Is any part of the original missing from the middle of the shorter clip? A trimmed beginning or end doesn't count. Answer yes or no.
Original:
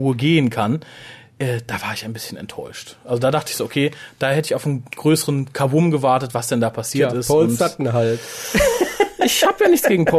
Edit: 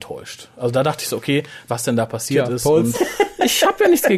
yes